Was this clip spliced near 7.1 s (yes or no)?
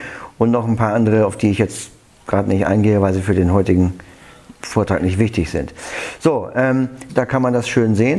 yes